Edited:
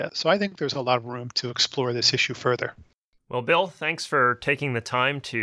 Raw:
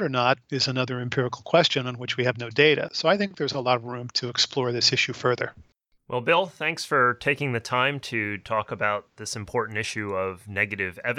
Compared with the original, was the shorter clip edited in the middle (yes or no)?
no